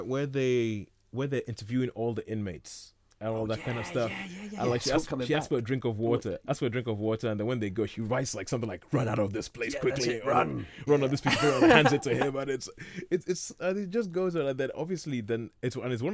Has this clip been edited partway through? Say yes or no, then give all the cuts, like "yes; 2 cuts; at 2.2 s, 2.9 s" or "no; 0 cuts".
no; 0 cuts